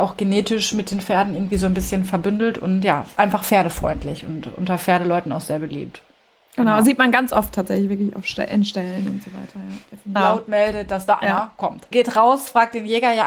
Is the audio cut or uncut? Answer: cut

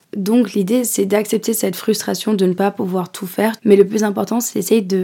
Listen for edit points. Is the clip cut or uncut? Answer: cut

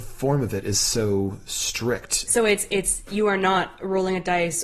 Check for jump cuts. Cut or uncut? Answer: uncut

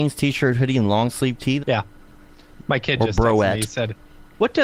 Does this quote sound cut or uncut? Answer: cut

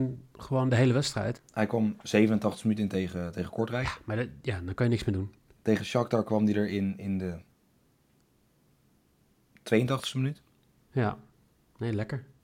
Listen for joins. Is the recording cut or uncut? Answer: cut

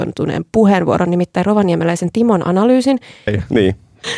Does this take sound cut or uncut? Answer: cut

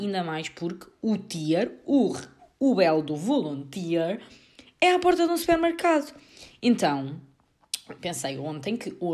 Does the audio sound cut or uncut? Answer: cut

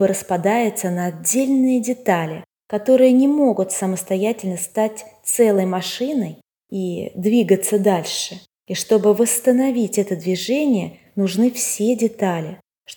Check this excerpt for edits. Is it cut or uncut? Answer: uncut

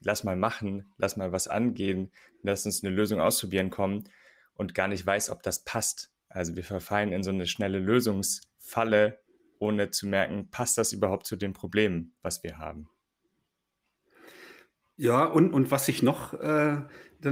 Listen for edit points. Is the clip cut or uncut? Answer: uncut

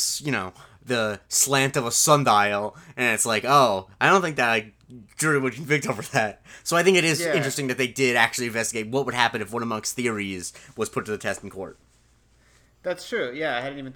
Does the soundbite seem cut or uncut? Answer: uncut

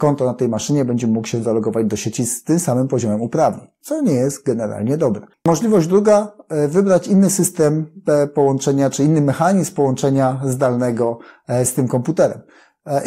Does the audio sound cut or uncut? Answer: uncut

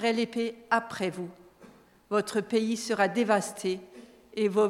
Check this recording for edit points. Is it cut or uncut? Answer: uncut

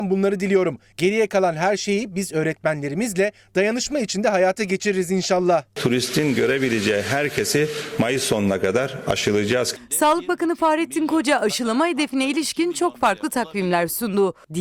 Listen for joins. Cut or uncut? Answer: uncut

